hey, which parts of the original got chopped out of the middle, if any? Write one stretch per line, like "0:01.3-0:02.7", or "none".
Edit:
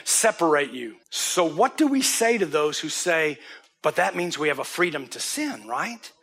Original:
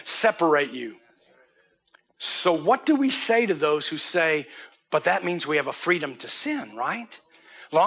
0:01.0-0:02.1